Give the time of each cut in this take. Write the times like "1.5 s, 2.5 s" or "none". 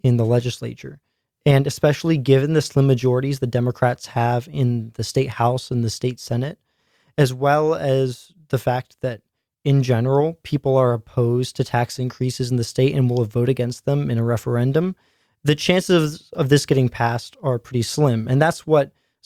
none